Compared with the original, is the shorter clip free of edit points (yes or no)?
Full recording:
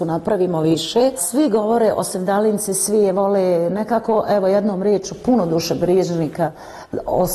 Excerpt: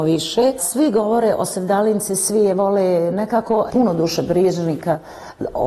no